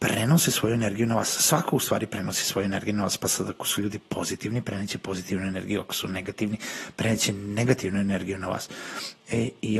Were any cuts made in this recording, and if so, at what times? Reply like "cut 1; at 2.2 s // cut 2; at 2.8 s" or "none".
none